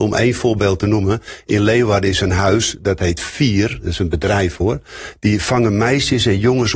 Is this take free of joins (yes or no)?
yes